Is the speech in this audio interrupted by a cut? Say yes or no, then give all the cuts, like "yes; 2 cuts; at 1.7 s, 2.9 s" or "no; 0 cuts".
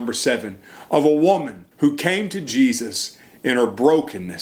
yes; 1 cut; at 1.7 s